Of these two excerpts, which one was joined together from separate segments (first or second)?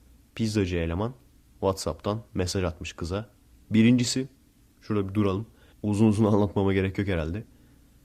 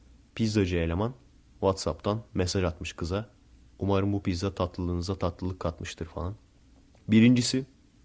first